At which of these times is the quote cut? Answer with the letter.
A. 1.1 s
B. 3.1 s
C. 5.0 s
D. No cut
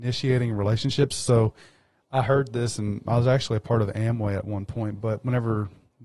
B